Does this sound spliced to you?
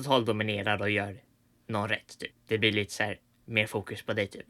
yes; 1 cut; at 2.3 s

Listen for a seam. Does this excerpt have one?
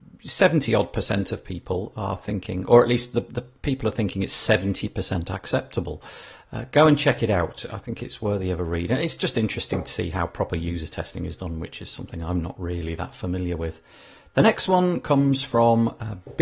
no; 0 cuts

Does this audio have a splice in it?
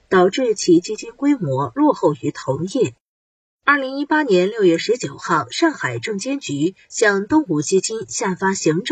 no; 0 cuts

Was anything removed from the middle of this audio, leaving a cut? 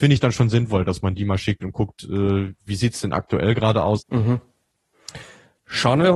yes; 1 cut; at 4.0 s

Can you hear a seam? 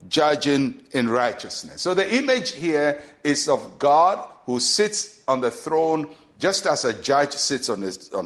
no; 0 cuts

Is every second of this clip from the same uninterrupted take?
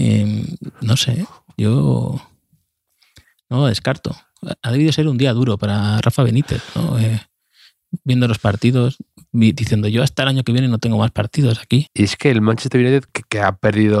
no; 2 cuts; at 11.9 s, 13.1 s

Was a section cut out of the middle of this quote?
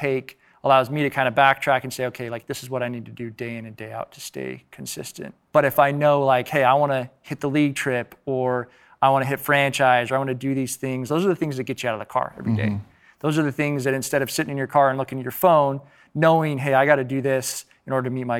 yes; 2 cuts; at 5.5 s, 11.1 s

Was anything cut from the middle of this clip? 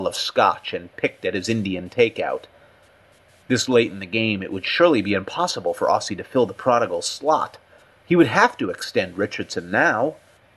no; 0 cuts

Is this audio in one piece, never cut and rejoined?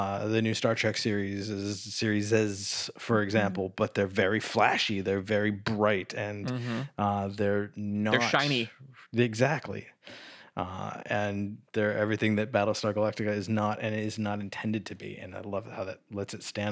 yes; 0 cuts

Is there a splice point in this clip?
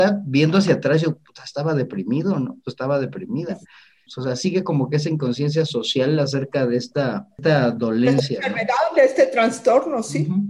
no; 0 cuts

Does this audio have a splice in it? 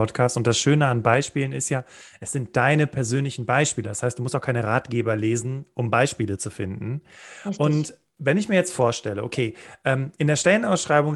no; 0 cuts

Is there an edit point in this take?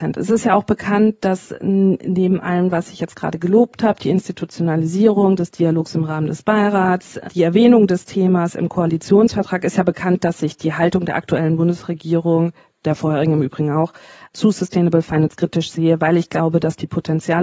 no; 0 cuts

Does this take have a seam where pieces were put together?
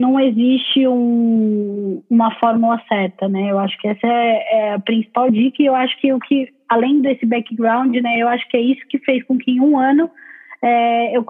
no; 0 cuts

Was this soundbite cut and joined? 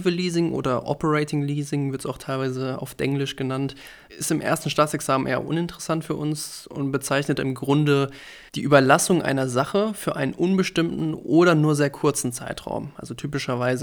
yes; 2 cuts; at 4.1 s, 8.5 s

